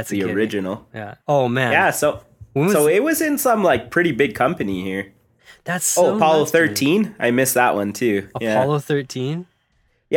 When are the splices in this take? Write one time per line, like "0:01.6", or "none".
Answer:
0:01.2